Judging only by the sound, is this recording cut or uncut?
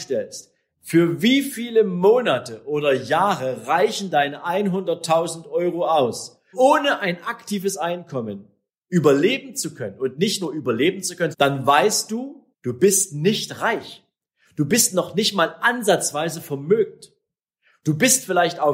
cut